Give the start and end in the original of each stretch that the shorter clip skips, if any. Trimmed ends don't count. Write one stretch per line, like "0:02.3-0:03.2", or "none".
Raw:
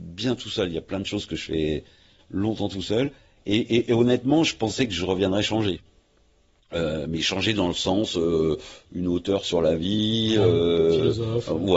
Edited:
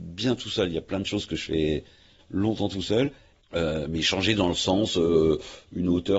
0:03.3-0:06.5